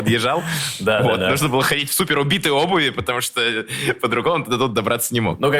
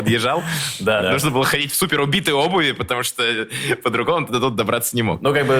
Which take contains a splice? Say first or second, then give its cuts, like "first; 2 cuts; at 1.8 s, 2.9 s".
second; 1 cut; at 1.0 s